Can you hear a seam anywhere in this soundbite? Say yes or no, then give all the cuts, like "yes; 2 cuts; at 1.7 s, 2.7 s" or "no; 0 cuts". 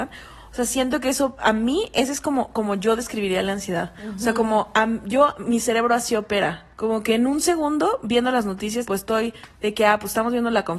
yes; 2 cuts; at 6.7 s, 8.9 s